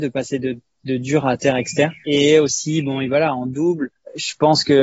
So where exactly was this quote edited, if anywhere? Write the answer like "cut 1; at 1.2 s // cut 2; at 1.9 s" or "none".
none